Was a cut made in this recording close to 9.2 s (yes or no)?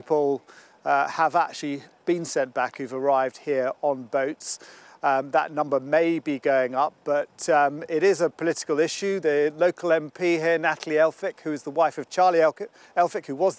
no